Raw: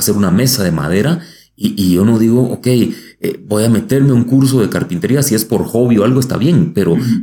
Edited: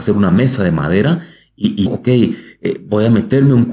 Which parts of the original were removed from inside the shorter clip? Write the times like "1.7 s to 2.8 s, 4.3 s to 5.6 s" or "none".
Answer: 1.9 s to 2.4 s